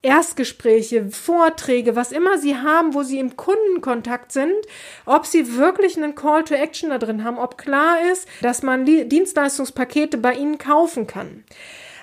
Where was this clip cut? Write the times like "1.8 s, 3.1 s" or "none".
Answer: 1.1 s, 8.4 s